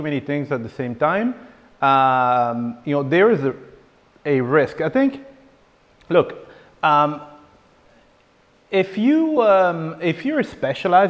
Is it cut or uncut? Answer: uncut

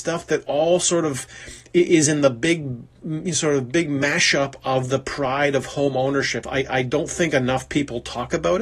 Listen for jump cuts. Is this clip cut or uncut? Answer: cut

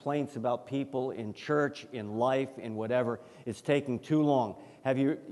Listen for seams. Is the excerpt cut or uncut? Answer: uncut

